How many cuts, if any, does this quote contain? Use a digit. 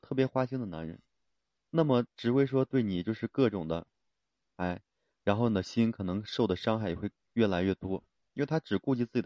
2